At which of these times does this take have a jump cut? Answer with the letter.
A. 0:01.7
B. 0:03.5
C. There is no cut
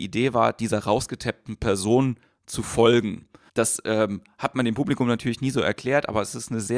B